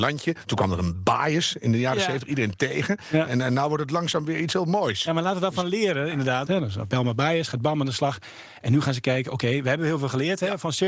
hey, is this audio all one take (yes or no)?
no